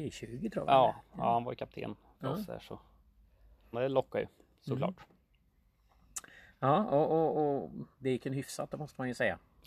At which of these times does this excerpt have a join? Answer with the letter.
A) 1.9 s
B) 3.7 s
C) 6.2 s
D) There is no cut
B